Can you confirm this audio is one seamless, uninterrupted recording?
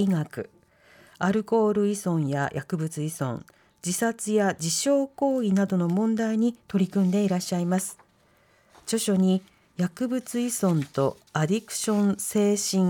yes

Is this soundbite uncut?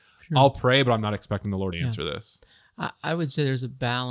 no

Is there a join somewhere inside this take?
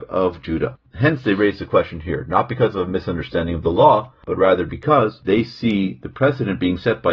no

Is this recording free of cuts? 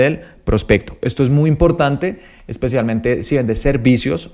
yes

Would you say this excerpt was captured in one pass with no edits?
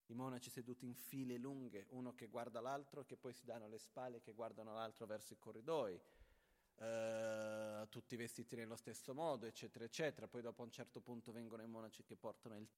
yes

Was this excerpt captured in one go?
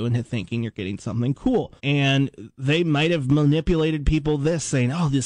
no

